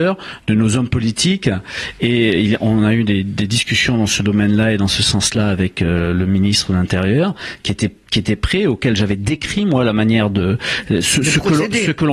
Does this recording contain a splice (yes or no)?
no